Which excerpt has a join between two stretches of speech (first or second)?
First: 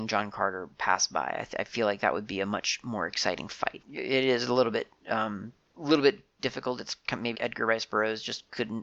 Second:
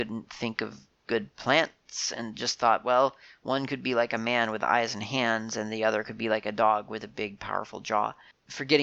first